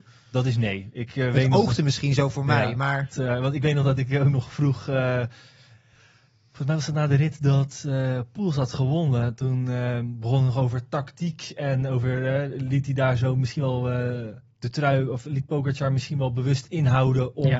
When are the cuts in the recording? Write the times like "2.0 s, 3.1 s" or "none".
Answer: 3.1 s